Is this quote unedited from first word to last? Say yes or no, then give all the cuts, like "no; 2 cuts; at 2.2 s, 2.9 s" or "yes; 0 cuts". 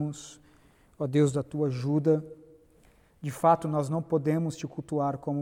yes; 0 cuts